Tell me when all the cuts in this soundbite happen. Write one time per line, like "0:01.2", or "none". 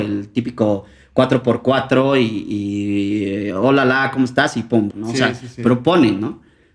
0:04.9